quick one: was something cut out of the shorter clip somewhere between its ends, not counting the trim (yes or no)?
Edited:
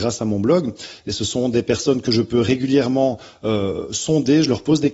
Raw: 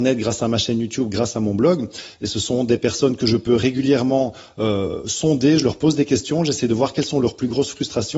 no